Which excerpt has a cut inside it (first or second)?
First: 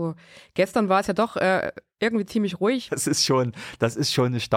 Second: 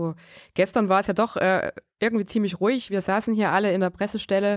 first